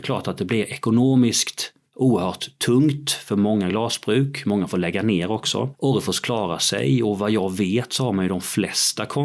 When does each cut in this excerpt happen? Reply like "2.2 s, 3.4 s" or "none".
5.7 s